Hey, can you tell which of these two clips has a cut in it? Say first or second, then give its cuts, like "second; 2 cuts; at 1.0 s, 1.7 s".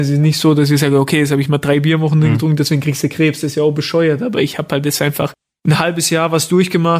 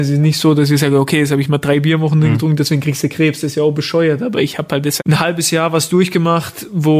second; 1 cut; at 5.0 s